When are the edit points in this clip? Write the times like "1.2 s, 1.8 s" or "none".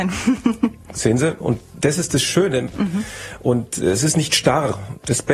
2.7 s